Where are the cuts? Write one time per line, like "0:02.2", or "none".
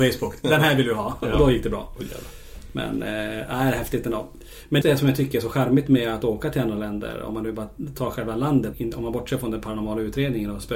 0:04.8
0:08.7